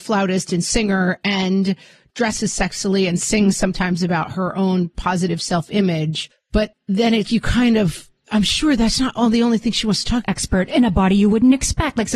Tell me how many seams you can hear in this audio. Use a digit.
2